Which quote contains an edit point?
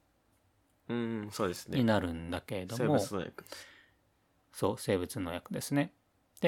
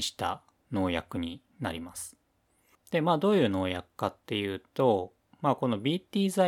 second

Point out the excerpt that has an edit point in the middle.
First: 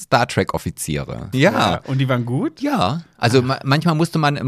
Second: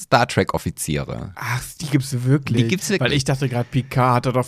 first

